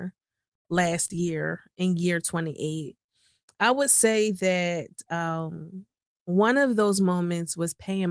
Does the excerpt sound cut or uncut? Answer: uncut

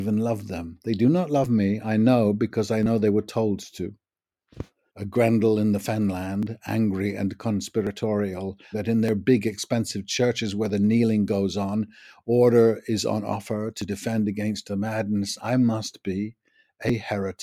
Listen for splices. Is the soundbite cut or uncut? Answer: cut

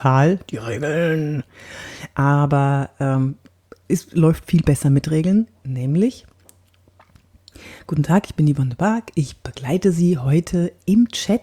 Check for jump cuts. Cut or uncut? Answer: uncut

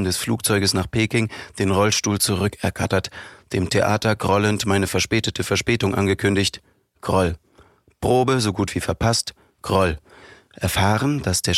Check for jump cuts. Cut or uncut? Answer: uncut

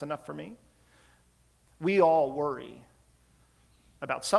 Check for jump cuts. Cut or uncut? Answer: cut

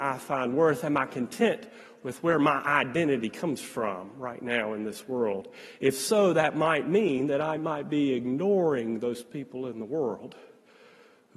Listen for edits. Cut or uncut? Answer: uncut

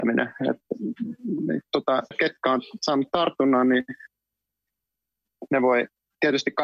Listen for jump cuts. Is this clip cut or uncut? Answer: cut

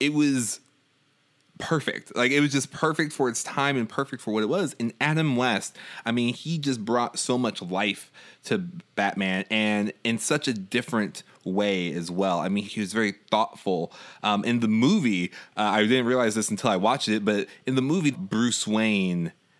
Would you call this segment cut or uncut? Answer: cut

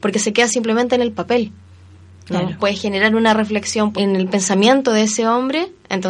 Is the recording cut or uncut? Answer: cut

